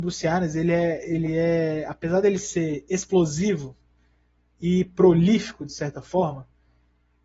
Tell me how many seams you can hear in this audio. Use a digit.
0